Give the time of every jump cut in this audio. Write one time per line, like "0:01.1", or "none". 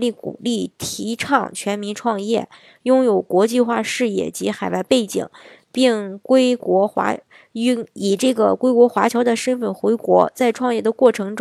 none